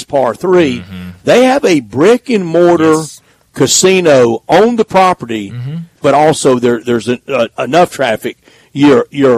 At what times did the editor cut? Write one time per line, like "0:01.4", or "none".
0:06.0